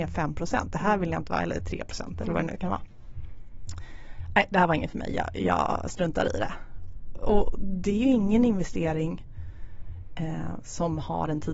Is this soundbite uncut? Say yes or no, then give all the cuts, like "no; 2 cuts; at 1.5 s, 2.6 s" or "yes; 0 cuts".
yes; 0 cuts